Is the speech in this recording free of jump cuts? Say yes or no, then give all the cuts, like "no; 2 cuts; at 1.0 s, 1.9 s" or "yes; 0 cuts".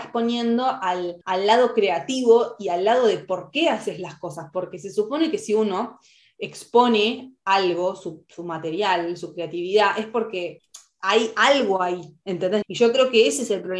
no; 2 cuts; at 1.2 s, 12.6 s